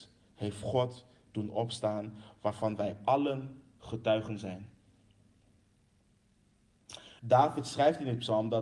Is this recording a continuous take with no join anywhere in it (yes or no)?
no